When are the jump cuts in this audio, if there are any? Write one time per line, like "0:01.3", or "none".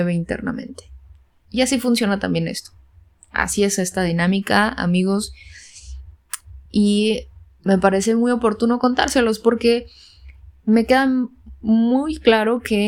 none